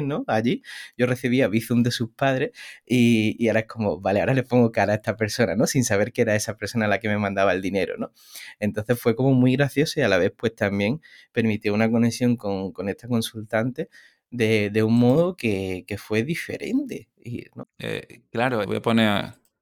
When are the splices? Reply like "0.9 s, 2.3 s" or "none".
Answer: 17.6 s, 18.6 s